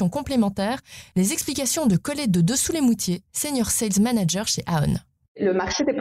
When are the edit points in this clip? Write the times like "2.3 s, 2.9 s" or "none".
none

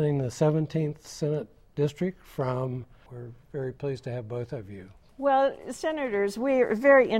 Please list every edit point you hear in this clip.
3.1 s, 5.1 s

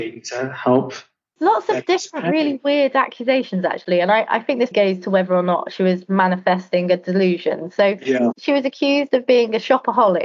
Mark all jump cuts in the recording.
4.7 s

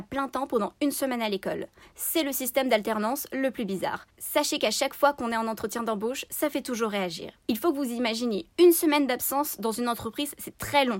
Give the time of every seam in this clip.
none

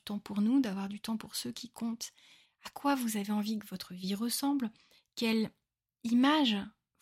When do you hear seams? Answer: 2.5 s

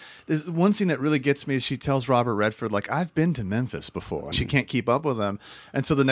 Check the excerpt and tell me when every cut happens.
4.3 s

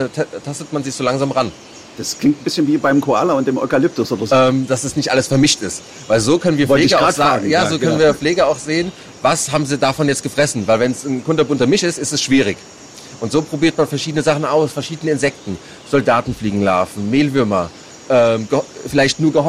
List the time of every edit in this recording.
4.3 s, 9.1 s

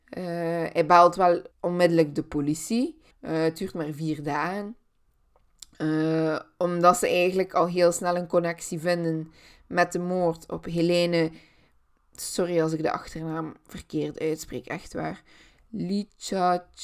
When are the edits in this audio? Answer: 1.5 s, 3.1 s

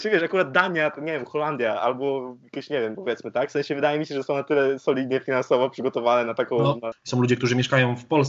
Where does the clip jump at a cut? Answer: 2.9 s, 6.9 s

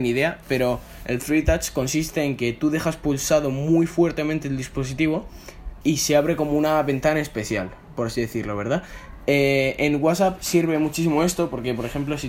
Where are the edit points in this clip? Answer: 5.8 s

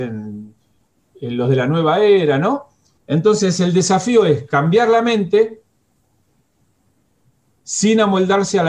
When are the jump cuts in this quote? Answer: 3.0 s

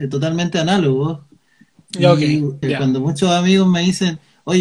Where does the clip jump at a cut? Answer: 2.6 s

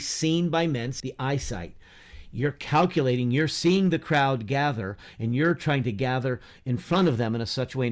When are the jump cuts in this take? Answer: 1.0 s

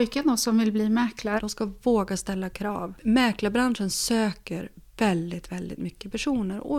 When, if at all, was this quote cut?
1.4 s

